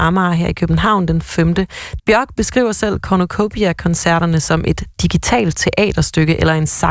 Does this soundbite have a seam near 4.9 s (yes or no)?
no